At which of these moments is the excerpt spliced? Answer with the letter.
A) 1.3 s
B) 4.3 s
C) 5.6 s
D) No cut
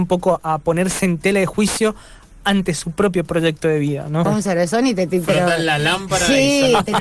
B